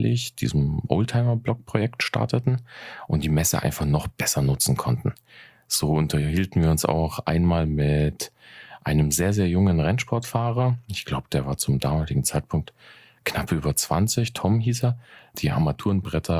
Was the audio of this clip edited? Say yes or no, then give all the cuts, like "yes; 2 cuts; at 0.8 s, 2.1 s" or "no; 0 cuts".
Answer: yes; 1 cut; at 15.3 s